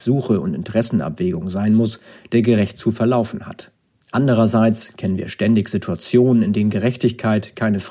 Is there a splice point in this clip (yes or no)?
yes